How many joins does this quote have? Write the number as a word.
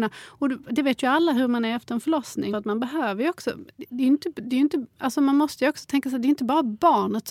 one